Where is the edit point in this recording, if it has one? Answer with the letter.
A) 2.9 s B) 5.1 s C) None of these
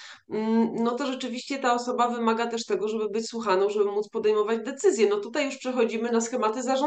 C